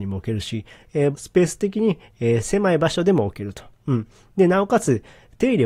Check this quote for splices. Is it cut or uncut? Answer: cut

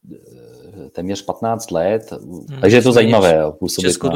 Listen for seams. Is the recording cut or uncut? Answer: cut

